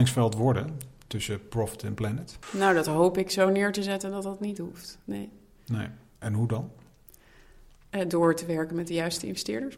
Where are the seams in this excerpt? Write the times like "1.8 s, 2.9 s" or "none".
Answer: none